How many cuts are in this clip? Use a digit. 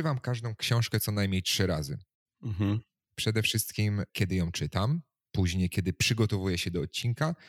0